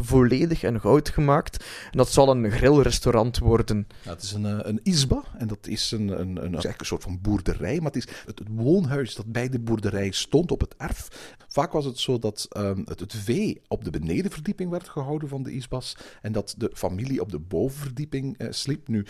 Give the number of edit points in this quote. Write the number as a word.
two